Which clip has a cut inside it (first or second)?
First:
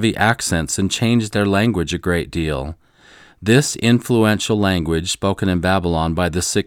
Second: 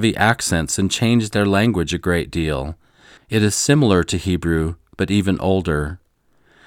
second